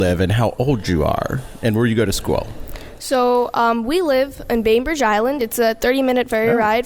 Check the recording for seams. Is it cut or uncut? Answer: uncut